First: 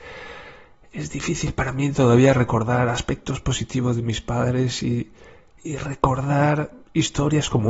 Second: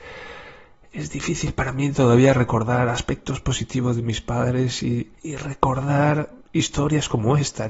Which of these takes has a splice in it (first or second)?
second